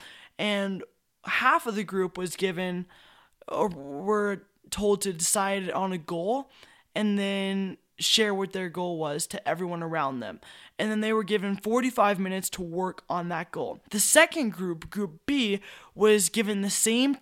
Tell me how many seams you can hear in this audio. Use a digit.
1